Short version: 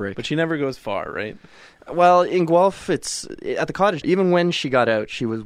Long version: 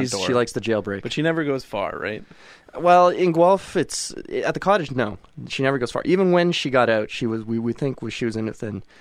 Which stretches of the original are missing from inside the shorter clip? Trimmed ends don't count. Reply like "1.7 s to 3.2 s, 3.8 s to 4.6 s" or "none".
4.9 s to 6.0 s

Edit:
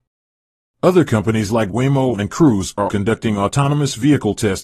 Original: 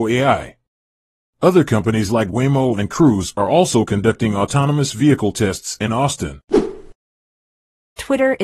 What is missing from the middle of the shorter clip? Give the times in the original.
3.5 s to 3.9 s

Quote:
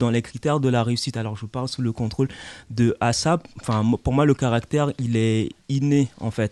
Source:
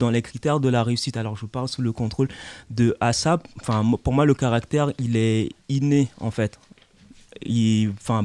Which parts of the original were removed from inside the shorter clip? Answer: none

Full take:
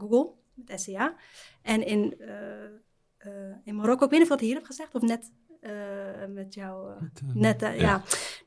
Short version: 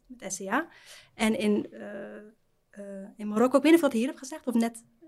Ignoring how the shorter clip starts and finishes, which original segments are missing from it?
none

